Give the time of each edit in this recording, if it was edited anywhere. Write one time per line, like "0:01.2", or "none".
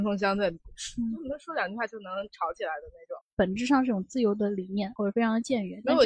0:03.2
0:05.0